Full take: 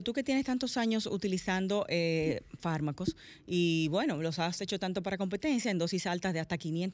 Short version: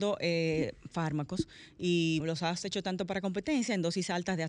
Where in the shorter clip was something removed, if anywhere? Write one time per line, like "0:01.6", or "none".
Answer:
0:02.2